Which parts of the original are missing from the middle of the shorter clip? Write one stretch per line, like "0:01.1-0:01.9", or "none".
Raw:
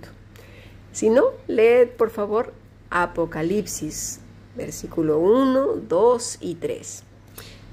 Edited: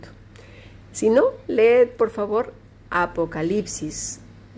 none